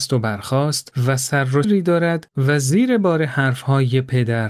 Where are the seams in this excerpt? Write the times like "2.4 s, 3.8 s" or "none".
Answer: 1.6 s